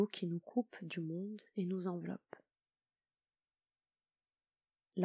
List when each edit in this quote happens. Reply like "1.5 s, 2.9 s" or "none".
none